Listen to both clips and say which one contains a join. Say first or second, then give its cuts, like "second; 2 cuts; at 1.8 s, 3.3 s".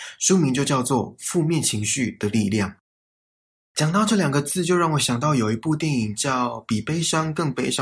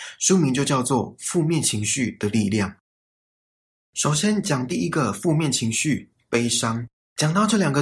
first; 1 cut; at 3.7 s